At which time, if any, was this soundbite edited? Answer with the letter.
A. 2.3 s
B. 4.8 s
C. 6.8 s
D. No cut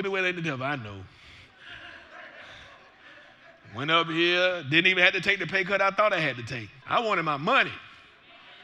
C